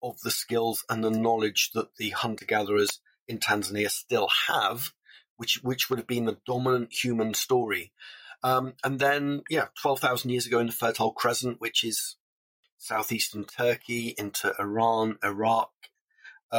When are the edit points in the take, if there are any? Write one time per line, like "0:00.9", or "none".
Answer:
none